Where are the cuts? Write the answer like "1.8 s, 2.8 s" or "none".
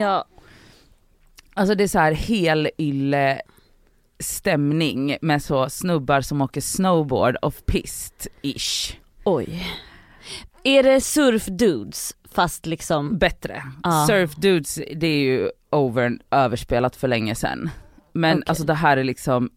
none